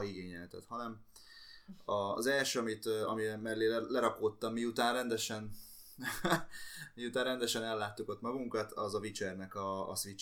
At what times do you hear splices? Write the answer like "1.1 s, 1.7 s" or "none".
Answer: none